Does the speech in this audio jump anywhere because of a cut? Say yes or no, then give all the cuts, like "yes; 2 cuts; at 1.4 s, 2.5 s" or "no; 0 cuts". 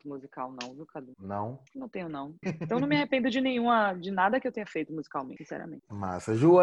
yes; 1 cut; at 2.4 s